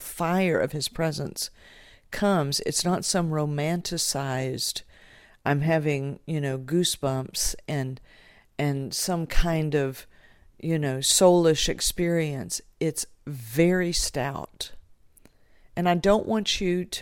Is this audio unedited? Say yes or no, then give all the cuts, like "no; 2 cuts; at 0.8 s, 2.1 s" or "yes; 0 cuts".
yes; 0 cuts